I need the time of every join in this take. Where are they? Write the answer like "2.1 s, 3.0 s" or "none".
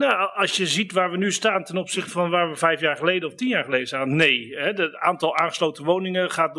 none

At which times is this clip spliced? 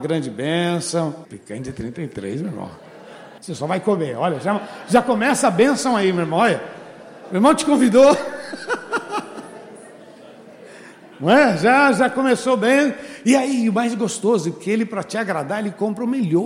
1.2 s, 3.4 s

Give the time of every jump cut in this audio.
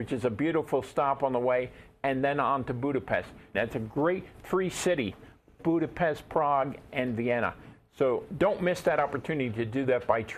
3.5 s

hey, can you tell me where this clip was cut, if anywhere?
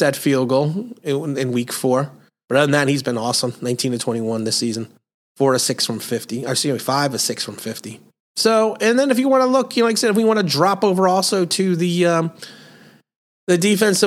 8.2 s

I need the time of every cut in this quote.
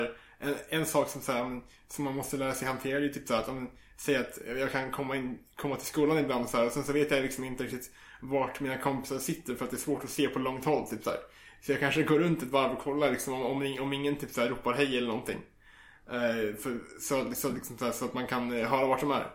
none

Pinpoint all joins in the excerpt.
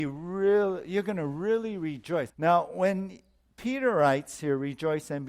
2.3 s

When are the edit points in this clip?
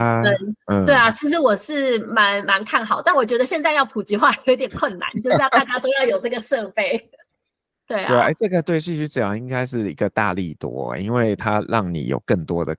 7.7 s

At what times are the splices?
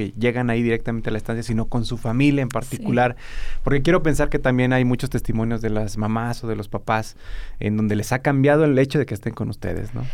none

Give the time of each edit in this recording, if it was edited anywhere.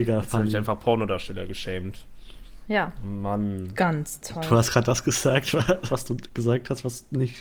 5.9 s

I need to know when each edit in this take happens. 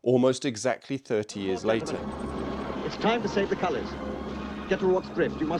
none

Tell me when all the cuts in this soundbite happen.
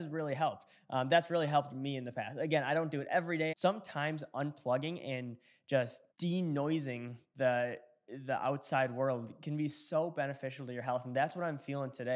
3.5 s, 6.1 s

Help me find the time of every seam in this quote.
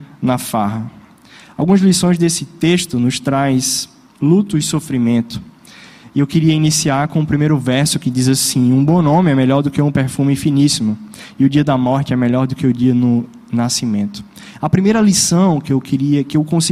none

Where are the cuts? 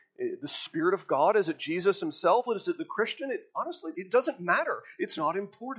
2.5 s, 3.9 s

